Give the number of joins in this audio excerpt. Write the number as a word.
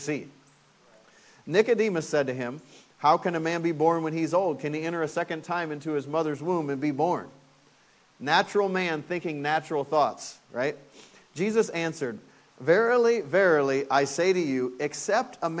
zero